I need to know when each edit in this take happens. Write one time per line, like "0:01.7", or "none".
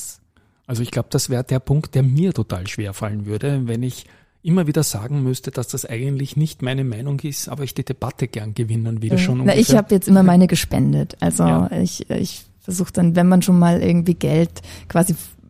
0:09.1